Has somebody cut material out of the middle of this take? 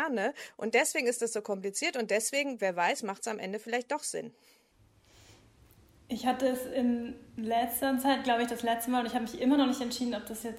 no; 0 cuts

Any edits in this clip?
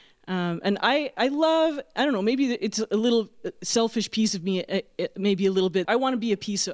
yes; 1 cut; at 5.9 s

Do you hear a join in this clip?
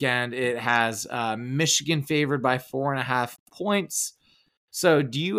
no; 0 cuts

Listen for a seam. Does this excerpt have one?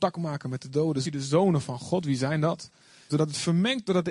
yes; 2 cuts; at 1.0 s, 3.1 s

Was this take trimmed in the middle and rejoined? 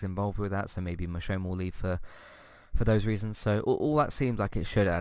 no; 0 cuts

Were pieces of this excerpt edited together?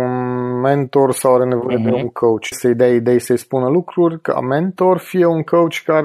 yes; 1 cut; at 2.5 s

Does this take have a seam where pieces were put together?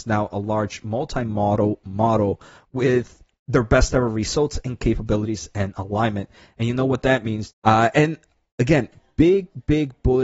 yes; 1 cut; at 7.5 s

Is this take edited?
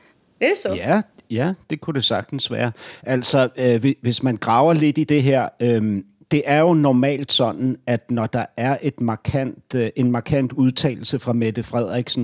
no; 0 cuts

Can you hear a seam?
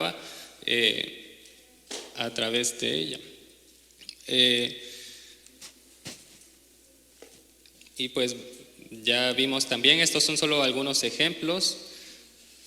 no; 0 cuts

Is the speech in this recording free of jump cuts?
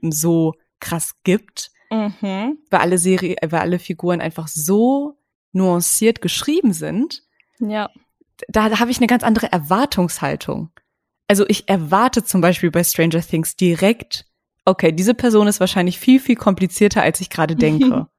yes; 0 cuts

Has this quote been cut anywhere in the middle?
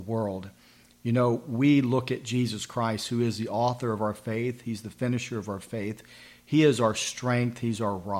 no; 0 cuts

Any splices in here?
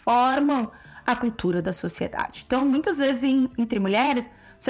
no; 0 cuts

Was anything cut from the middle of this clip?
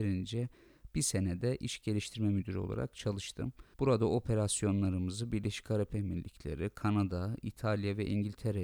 no; 0 cuts

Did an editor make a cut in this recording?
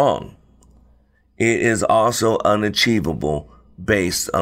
no; 0 cuts

